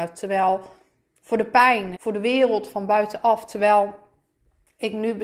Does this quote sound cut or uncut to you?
cut